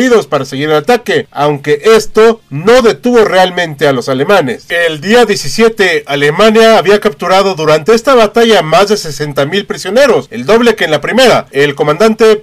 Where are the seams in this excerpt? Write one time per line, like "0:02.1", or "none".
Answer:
none